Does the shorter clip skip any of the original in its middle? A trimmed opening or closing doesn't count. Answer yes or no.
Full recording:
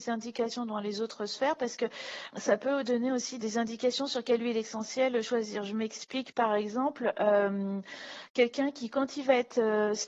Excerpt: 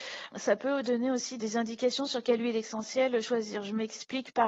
no